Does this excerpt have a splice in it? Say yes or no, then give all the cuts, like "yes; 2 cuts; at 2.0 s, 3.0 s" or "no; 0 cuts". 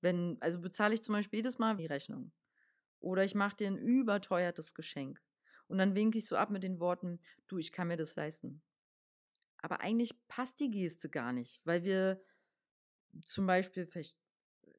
yes; 1 cut; at 1.8 s